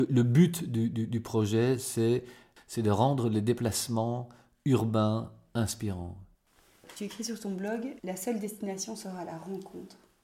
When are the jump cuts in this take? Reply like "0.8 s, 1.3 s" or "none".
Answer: 8.0 s

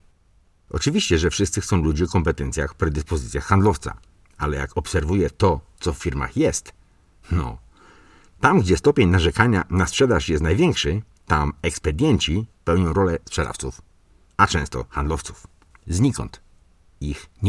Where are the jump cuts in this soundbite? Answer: 15.7 s

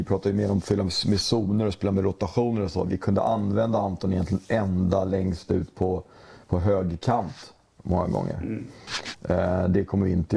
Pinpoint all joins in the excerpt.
none

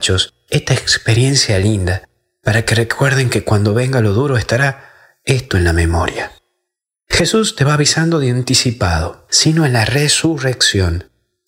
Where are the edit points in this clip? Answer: 9.3 s

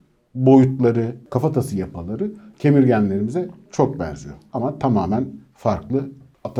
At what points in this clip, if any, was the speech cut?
2.5 s

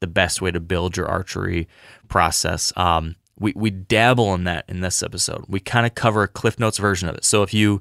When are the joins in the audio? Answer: none

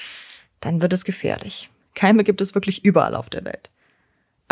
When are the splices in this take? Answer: 1.8 s

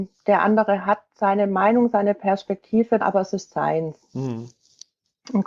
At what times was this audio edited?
3.0 s

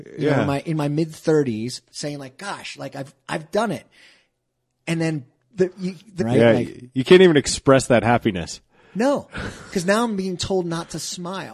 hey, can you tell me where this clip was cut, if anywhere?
6.2 s

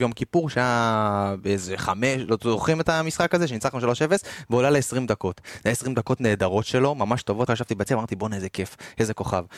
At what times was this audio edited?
7.5 s

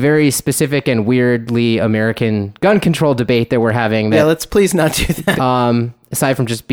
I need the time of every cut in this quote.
5.4 s

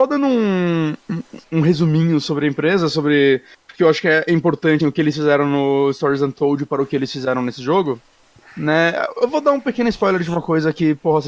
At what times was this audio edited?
1.4 s, 4.8 s

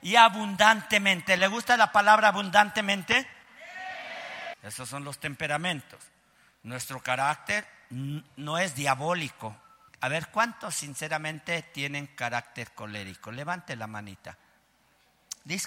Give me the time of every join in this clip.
4.5 s, 8.3 s, 9.9 s

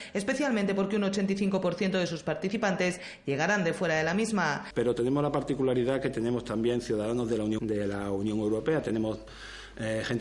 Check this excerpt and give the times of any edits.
4.7 s, 7.6 s

